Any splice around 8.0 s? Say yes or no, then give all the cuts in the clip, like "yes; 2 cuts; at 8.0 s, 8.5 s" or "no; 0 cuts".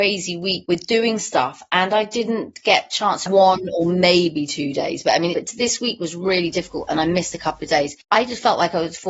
no; 2 cuts; at 3.3 s, 5.3 s